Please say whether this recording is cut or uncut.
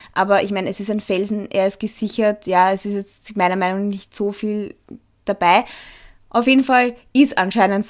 uncut